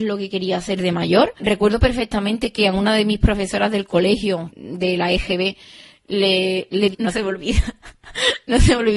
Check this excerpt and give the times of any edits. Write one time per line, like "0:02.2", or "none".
0:04.5
0:06.9